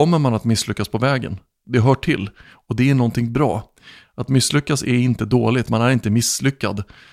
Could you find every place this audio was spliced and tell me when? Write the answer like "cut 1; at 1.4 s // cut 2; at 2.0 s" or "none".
none